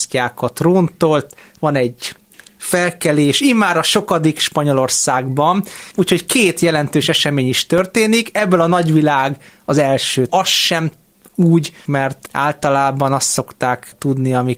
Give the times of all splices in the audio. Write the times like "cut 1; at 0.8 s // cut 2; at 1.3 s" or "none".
cut 1; at 10.3 s // cut 2; at 11.9 s

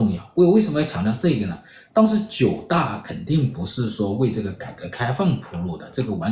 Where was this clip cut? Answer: none

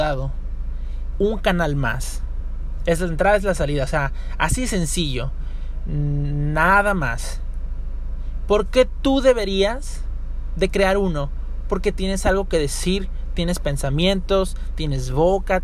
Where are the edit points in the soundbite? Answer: cut 1; at 1.1 s // cut 2; at 2.8 s

